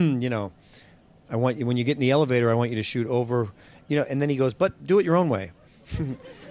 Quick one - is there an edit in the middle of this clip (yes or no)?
no